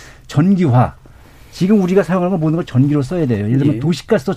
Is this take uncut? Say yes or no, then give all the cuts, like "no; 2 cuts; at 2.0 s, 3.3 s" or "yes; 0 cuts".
yes; 0 cuts